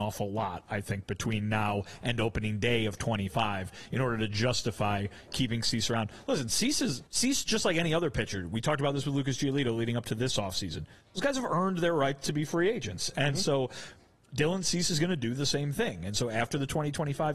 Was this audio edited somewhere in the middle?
yes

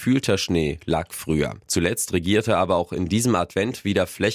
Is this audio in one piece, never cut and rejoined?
no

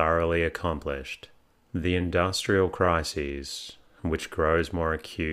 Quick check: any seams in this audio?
yes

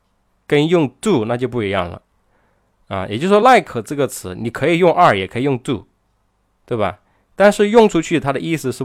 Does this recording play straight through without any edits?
yes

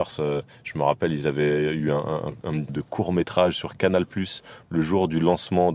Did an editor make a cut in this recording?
yes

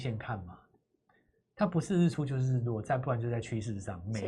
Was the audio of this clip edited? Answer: no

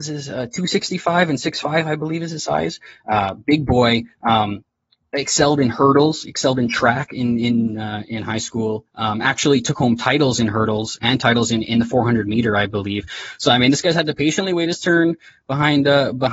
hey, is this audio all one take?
yes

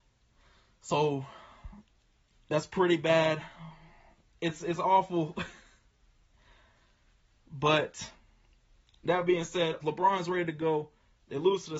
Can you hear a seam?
yes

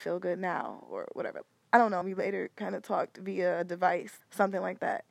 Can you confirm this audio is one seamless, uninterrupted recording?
no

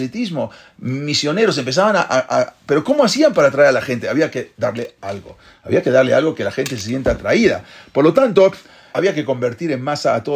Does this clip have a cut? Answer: yes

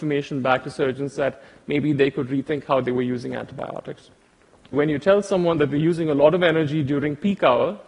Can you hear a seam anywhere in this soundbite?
yes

